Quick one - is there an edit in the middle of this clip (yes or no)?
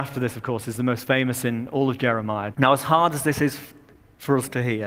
yes